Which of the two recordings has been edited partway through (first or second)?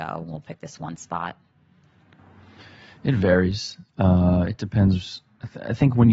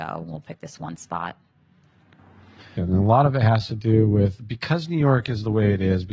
second